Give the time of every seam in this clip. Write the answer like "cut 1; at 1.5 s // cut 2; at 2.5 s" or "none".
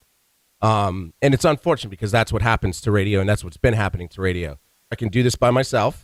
cut 1; at 4.9 s